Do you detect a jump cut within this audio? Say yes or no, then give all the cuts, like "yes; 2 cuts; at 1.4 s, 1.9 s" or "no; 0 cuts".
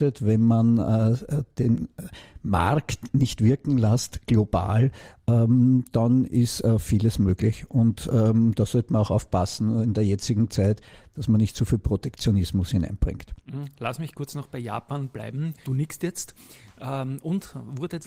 yes; 1 cut; at 15.6 s